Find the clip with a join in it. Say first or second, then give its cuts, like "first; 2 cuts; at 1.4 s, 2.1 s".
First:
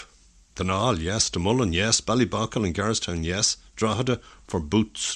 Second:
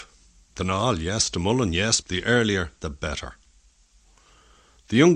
second; 1 cut; at 2.0 s